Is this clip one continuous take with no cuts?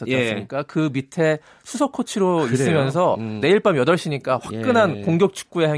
no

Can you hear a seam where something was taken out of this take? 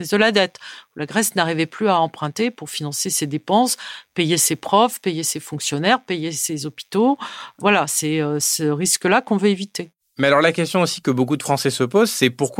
no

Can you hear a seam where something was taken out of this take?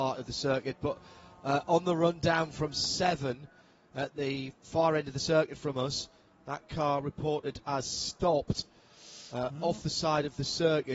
no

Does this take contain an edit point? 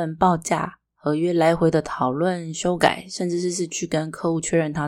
no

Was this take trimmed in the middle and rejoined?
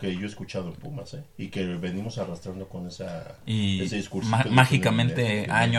yes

